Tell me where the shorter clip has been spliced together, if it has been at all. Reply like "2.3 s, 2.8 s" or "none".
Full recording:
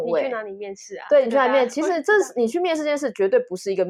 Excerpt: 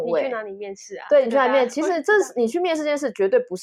none